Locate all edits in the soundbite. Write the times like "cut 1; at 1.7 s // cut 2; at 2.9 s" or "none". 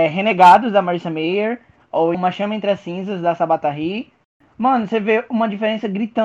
cut 1; at 2.1 s